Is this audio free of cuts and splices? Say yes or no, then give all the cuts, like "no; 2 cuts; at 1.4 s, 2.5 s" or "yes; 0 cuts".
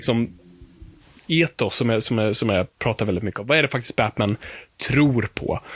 yes; 0 cuts